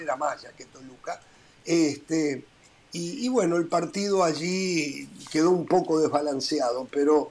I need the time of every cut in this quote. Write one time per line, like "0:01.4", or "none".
none